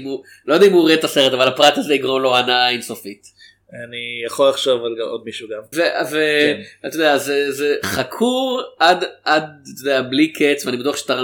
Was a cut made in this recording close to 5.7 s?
yes; 1 cut; at 5.7 s

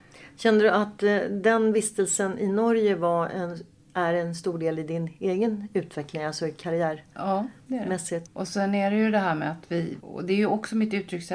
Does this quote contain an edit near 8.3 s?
yes; 2 cuts; at 8.3 s, 10.0 s

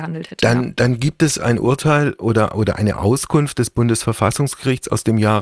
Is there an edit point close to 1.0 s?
no; 0 cuts

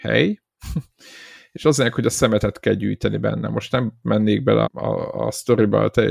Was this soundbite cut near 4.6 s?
yes; 1 cut; at 4.6 s

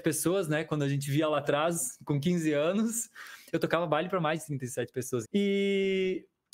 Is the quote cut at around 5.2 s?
yes; 1 cut; at 5.2 s

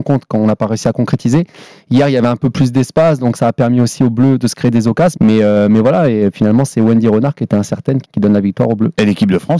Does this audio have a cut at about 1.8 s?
no; 2 cuts; at 5.1 s, 8.0 s

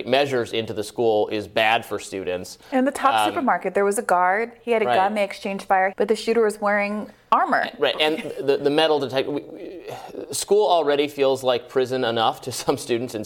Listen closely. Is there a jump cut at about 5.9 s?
yes; 1 cut; at 5.9 s

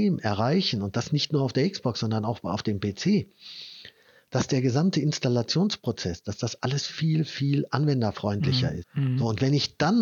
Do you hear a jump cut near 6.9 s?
yes; 2 cuts; at 6.9 s, 8.8 s

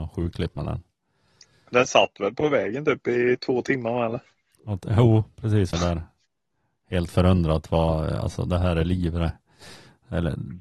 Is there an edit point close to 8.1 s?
no; 1 cut; at 5.7 s

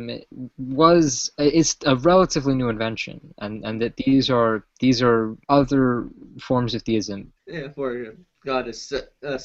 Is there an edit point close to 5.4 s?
yes; 2 cuts; at 5.4 s, 7.4 s

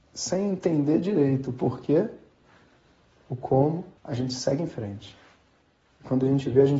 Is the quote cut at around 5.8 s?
no; 1 cut; at 4.0 s

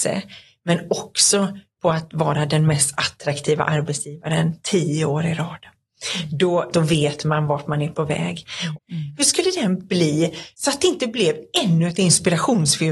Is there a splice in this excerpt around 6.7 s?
yes; 2 cuts; at 6.7 s, 8.7 s

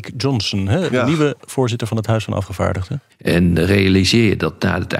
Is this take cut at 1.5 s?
no; 1 cut; at 3.1 s

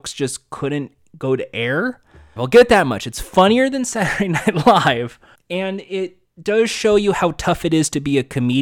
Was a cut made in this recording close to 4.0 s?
no; 2 cuts; at 2.4 s, 5.3 s

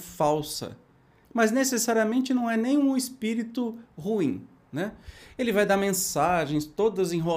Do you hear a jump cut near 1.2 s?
yes; 1 cut; at 1.2 s

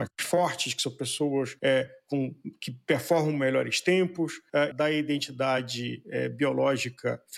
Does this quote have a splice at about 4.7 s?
yes; 1 cut; at 4.7 s

